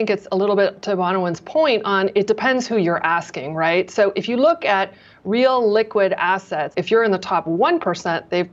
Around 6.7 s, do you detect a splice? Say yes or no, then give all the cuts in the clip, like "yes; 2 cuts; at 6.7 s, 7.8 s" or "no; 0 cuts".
yes; 1 cut; at 6.7 s